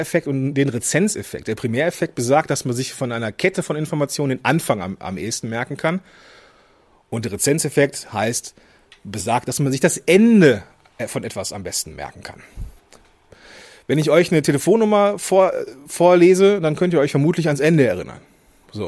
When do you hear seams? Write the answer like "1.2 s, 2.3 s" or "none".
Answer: none